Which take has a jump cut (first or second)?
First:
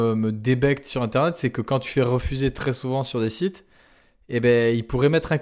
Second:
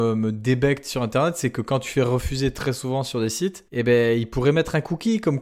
second